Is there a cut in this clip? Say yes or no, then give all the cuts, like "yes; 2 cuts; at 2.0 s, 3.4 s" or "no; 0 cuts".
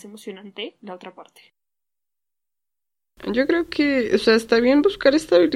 no; 0 cuts